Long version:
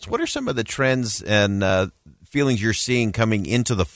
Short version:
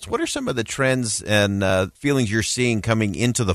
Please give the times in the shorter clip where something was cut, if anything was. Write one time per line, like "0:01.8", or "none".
0:02.0